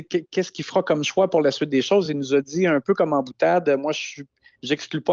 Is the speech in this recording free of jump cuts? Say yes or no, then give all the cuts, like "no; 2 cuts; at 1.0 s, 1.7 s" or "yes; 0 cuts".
yes; 0 cuts